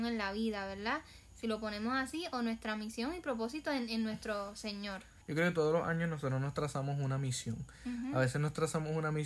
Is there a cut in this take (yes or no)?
yes